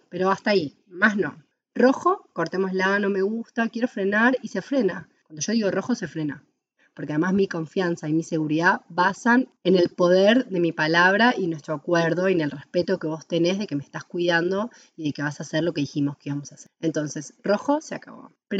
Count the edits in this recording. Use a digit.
0